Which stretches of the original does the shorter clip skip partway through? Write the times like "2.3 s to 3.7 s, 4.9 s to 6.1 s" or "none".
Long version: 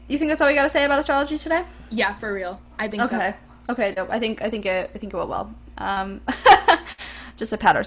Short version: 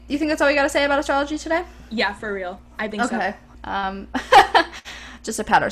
3.5 s to 5.7 s